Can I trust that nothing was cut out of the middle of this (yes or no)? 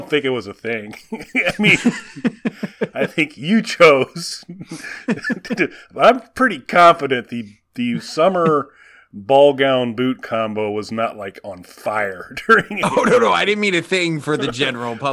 yes